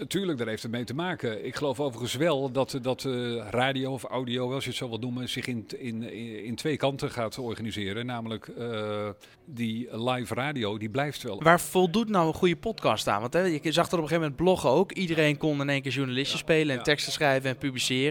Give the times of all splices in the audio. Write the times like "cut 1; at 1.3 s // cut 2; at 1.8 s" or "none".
cut 1; at 9.3 s // cut 2; at 11.4 s